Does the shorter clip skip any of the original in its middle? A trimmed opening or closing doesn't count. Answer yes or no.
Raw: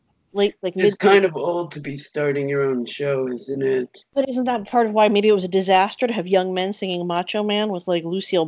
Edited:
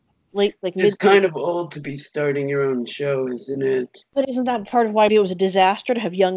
yes